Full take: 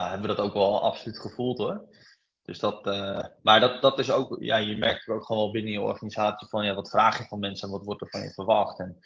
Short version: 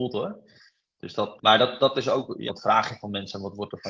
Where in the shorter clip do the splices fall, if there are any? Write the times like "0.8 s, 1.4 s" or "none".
1.4 s, 2.5 s